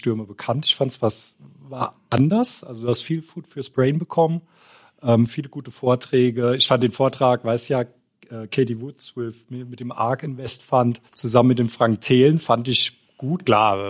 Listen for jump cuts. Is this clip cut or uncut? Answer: cut